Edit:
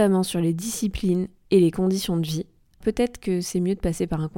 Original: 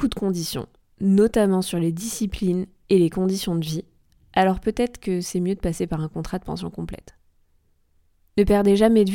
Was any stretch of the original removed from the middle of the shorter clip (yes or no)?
yes